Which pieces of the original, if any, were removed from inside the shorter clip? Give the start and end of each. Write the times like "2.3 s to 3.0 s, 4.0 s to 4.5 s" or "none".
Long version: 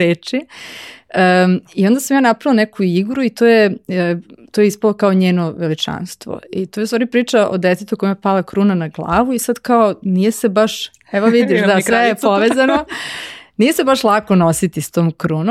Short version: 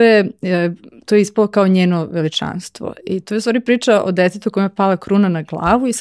none